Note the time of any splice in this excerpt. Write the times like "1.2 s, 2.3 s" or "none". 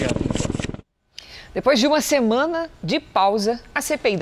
none